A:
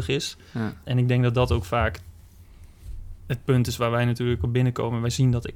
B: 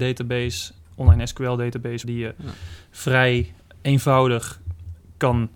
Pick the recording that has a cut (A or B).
B